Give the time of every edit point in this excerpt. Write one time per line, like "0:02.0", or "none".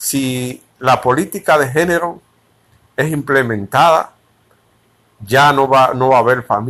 none